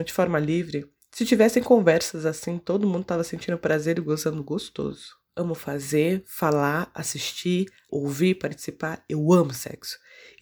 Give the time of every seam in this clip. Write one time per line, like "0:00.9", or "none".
0:05.3
0:07.9